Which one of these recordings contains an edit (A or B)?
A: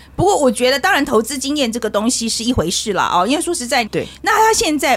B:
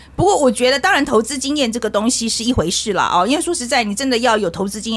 A